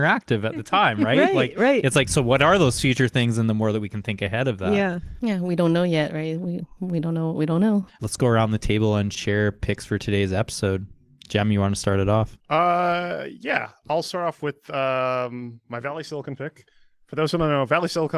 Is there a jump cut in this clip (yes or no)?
yes